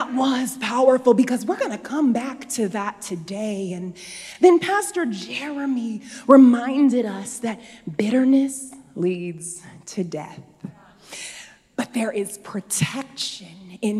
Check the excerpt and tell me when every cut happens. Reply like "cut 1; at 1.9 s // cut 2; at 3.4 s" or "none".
none